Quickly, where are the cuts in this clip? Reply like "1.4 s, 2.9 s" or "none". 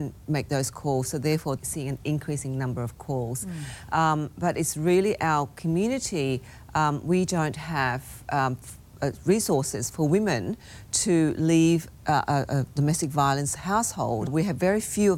1.6 s, 14.3 s